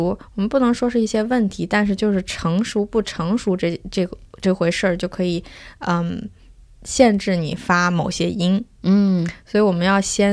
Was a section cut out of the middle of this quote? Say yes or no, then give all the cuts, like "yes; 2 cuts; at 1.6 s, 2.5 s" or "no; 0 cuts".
no; 0 cuts